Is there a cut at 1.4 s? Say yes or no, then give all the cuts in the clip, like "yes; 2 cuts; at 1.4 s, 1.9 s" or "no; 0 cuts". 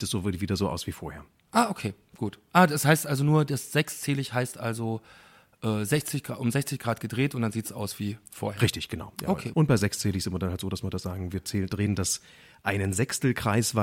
no; 1 cut; at 9.5 s